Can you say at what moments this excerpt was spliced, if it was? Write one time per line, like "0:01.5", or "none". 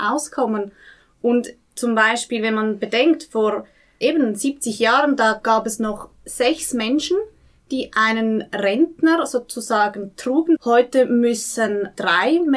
0:10.6